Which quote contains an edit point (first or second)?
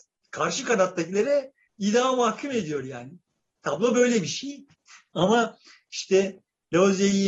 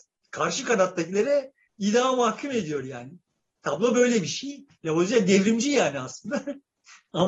first